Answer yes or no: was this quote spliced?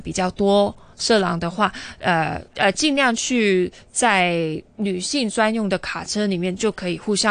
yes